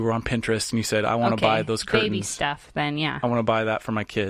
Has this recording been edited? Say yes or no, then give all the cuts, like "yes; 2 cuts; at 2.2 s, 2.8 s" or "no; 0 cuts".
no; 0 cuts